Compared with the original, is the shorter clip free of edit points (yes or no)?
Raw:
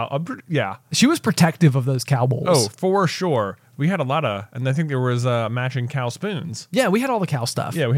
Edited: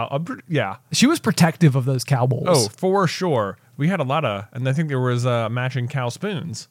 yes